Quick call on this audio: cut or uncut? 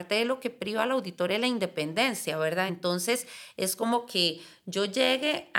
uncut